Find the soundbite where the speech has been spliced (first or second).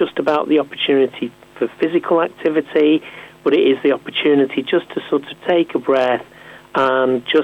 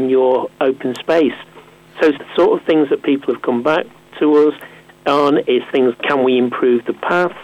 second